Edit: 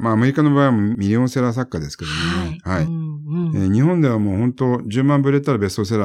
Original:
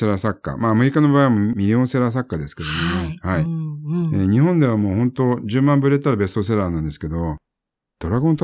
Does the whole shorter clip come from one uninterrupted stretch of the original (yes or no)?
yes